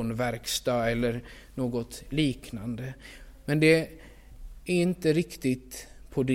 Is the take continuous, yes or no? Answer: yes